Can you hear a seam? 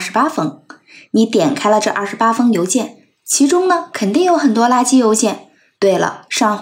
no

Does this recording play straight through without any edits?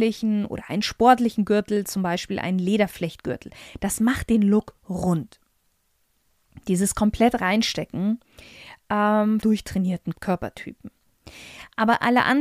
no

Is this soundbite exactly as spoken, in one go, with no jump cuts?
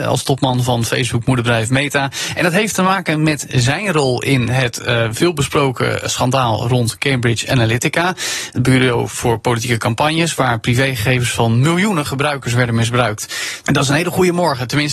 no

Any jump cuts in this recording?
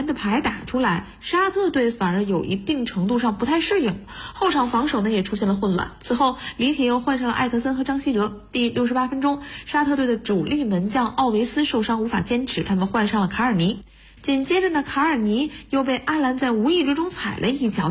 no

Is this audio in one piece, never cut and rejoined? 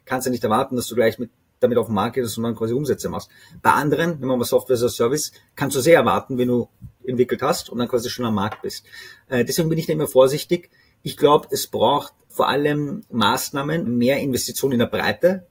no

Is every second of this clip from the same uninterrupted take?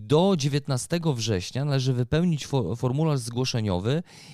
yes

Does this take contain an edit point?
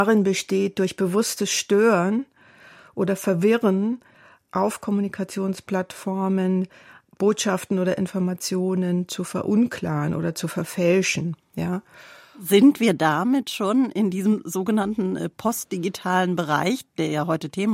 no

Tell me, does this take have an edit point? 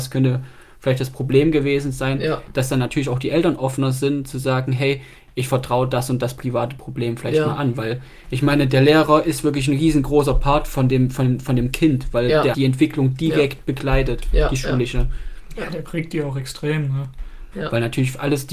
yes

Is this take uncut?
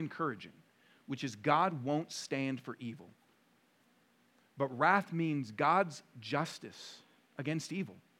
no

